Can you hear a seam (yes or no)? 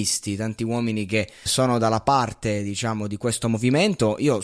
yes